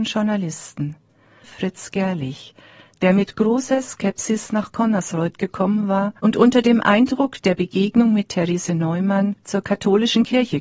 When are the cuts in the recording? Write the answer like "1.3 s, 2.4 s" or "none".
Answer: 1.4 s, 6.2 s